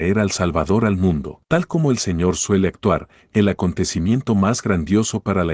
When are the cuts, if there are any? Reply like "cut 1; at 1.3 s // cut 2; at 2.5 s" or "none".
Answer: cut 1; at 1.4 s

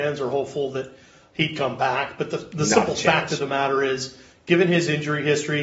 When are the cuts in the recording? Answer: none

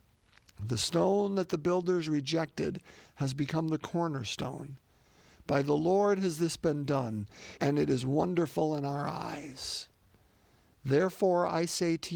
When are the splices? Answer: cut 1; at 7.6 s

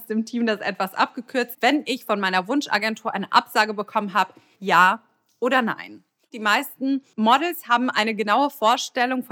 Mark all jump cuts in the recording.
cut 1; at 1.5 s // cut 2; at 4.6 s

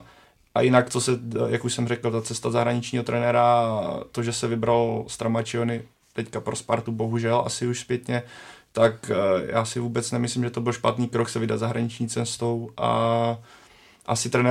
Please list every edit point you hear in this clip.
none

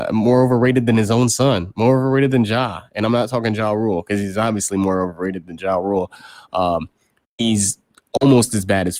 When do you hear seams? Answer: none

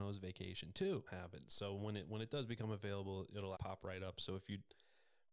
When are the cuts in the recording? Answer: cut 1; at 1.1 s // cut 2; at 3.6 s

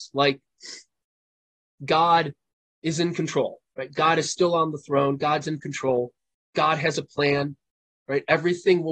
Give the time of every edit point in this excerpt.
none

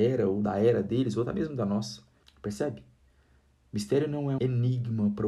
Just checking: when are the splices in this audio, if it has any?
cut 1; at 2.2 s // cut 2; at 4.4 s

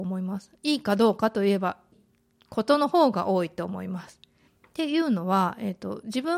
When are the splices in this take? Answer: cut 1; at 1.9 s // cut 2; at 4.5 s

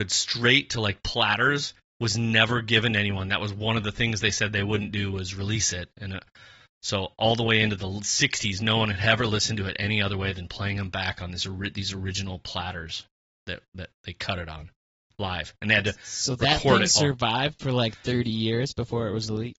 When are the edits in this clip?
none

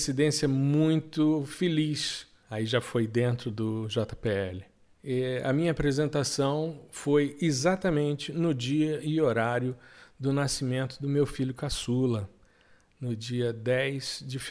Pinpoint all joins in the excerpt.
cut 1; at 2.4 s // cut 2; at 4.9 s

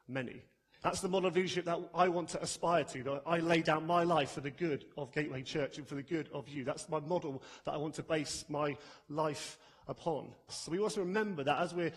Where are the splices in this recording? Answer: cut 1; at 10.5 s

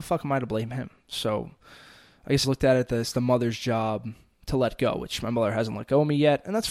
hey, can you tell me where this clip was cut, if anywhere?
cut 1; at 2.4 s

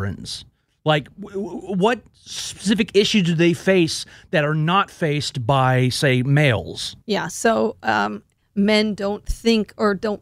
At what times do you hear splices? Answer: cut 1; at 7.0 s // cut 2; at 8.4 s

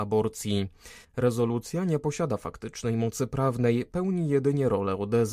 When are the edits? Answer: cut 1; at 1.0 s

